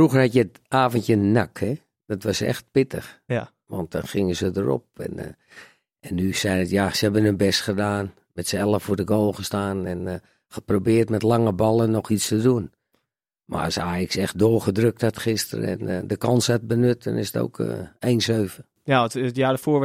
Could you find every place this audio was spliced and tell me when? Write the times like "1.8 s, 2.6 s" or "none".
none